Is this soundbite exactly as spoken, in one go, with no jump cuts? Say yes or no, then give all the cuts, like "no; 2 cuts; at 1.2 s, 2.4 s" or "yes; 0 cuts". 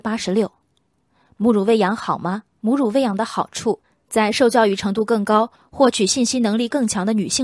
no; 1 cut; at 2.6 s